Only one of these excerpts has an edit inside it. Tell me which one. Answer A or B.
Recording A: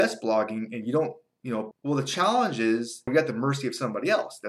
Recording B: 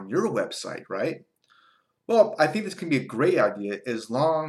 A